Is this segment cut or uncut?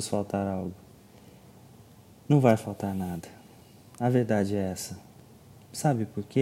uncut